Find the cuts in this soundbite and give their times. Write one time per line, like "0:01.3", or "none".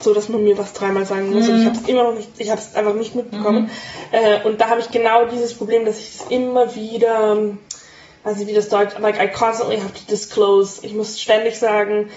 none